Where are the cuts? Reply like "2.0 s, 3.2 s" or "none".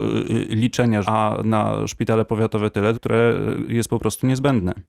1.0 s, 2.9 s